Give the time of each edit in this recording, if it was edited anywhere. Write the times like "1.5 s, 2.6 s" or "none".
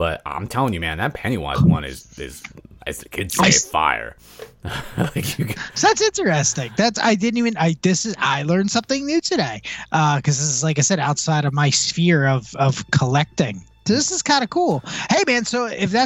none